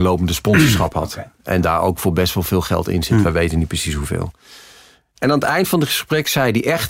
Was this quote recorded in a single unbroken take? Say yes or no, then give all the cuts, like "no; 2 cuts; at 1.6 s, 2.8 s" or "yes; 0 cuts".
yes; 0 cuts